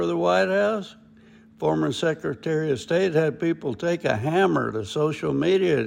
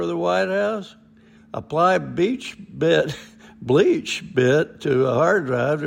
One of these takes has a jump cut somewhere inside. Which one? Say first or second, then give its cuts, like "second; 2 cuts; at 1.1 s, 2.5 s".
second; 1 cut; at 1.4 s